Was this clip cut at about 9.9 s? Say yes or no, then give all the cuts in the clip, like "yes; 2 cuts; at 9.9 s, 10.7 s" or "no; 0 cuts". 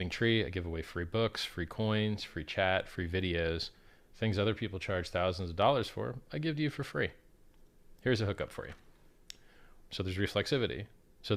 yes; 1 cut; at 9.9 s